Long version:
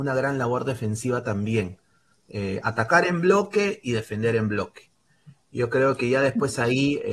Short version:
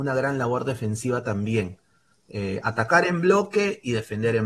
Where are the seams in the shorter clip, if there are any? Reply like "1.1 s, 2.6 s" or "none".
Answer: none